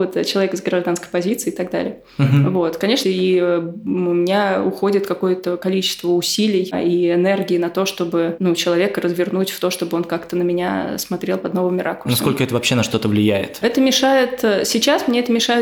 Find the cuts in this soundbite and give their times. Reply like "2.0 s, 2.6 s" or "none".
3.0 s, 13.6 s